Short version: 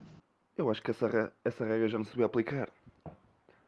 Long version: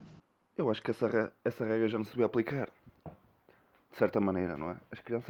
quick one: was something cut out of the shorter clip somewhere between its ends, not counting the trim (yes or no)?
no